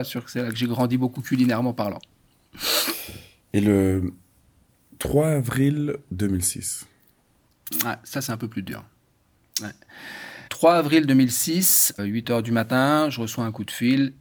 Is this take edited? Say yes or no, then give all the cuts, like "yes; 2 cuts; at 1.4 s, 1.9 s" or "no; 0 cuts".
yes; 2 cuts; at 10.5 s, 12.0 s